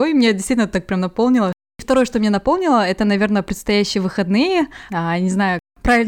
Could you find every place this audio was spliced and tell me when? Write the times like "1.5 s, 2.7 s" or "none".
4.9 s